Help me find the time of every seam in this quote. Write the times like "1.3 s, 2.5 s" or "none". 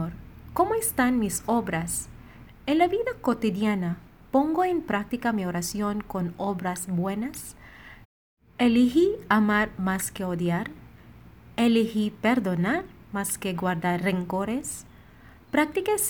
2.5 s